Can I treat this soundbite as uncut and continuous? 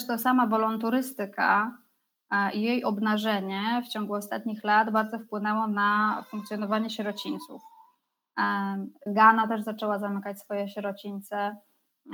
no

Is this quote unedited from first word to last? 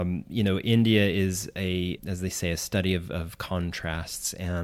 no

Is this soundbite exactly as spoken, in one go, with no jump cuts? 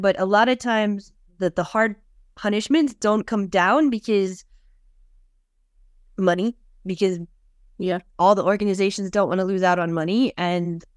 yes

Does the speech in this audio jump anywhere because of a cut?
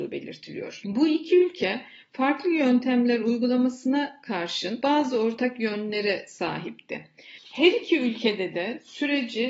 yes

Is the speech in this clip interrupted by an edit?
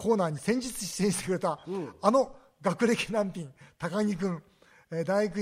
no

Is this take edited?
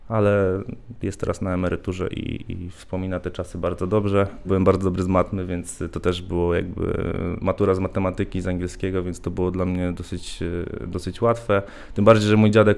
yes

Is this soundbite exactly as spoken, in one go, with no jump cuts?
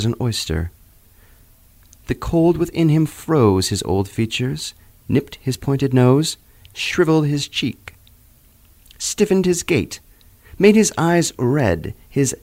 yes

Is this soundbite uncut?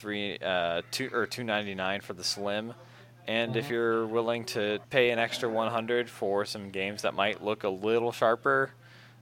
no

